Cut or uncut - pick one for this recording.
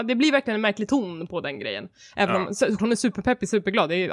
cut